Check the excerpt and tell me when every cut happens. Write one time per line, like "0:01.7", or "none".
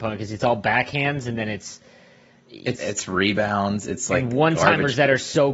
0:02.7